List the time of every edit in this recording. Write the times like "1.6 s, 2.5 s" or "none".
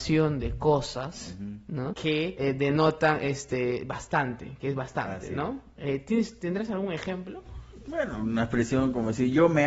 none